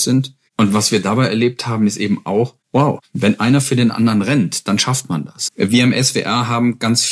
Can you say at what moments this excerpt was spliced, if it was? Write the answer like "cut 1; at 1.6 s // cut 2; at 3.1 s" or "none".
cut 1; at 5.5 s